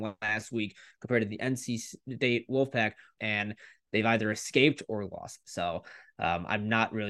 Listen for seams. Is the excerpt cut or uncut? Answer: cut